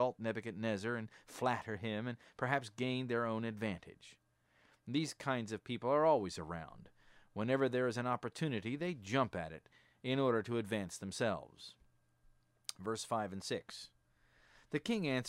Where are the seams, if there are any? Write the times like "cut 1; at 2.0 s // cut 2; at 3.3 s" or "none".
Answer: none